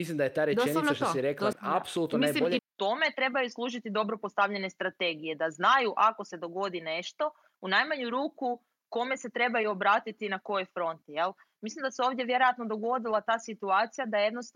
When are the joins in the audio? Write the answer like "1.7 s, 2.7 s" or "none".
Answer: 1.5 s, 2.6 s